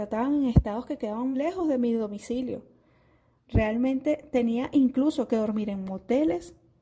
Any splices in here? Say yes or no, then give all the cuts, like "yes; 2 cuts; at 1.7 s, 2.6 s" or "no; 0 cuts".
yes; 1 cut; at 1.3 s